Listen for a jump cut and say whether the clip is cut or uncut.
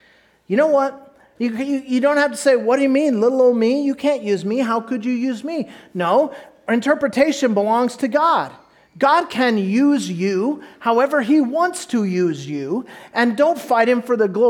cut